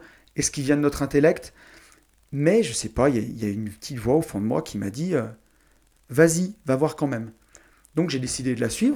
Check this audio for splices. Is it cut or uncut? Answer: cut